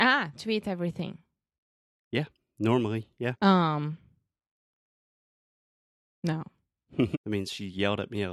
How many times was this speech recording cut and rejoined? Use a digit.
2